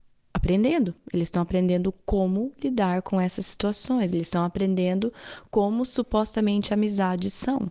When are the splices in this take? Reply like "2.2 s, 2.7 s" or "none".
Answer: none